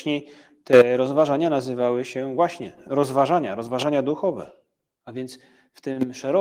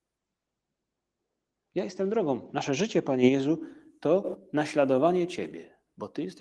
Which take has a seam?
first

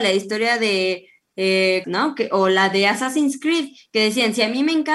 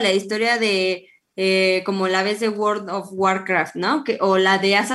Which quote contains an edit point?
first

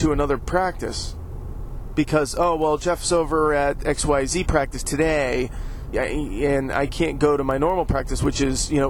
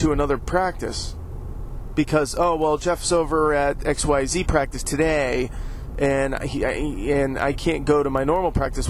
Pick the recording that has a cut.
first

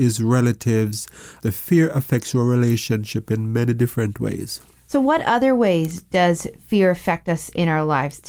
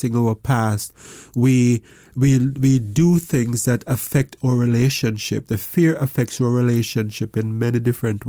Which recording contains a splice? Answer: first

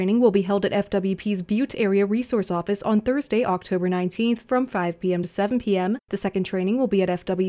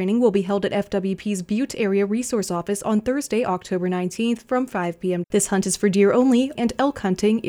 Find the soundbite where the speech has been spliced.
second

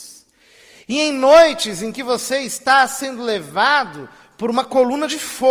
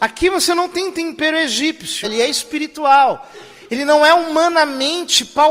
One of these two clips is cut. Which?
second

